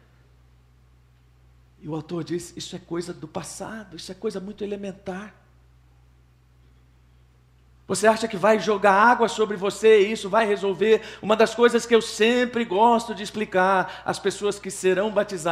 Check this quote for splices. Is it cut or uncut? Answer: uncut